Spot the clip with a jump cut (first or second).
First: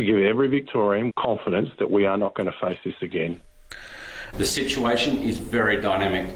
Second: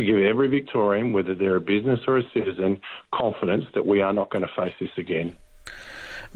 first